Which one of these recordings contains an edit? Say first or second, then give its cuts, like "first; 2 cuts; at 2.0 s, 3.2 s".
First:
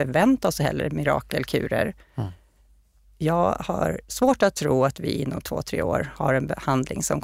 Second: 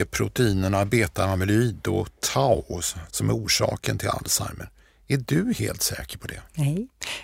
second; 1 cut; at 3.1 s